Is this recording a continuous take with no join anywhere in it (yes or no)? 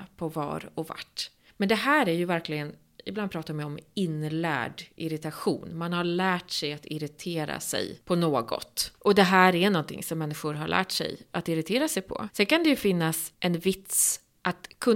yes